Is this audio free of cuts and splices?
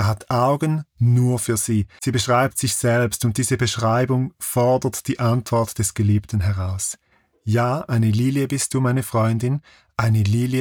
no; 1 cut; at 2.0 s

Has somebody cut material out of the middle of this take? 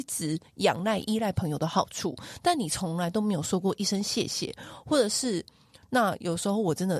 yes; 1 cut; at 5.8 s

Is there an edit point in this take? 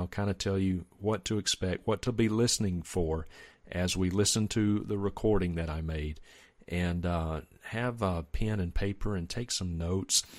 no; 0 cuts

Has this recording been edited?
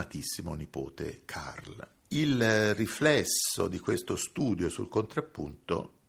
yes; 1 cut; at 2.0 s

